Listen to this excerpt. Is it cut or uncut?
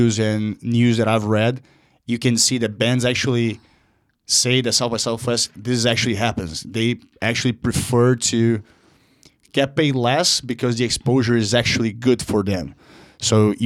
uncut